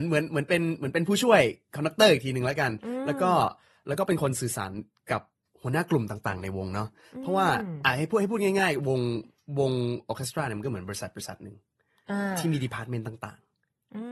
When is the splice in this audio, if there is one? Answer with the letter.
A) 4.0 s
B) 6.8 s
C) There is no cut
C